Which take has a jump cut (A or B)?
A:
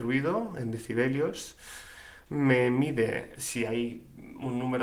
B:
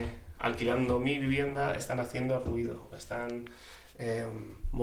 A